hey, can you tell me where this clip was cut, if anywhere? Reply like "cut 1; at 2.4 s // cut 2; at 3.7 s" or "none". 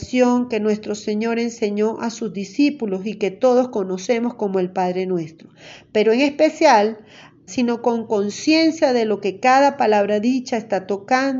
cut 1; at 7.5 s